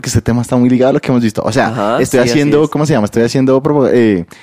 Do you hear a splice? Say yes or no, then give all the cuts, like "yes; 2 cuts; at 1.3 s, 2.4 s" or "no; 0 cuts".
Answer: no; 0 cuts